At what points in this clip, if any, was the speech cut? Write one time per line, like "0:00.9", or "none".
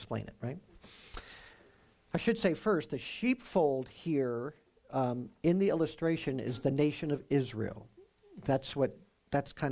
none